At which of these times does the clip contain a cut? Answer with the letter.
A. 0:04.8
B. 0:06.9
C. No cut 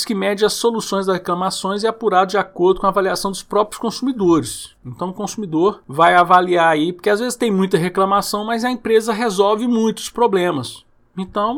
C